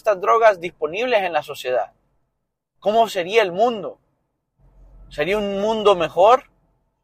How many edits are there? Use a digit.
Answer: 0